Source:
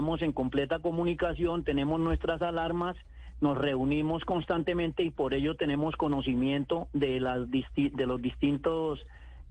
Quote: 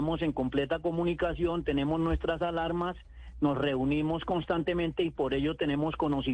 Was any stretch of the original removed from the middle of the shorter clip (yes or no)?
no